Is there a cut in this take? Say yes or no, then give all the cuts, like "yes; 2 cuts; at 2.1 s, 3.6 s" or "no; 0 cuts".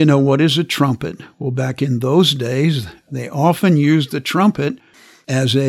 no; 0 cuts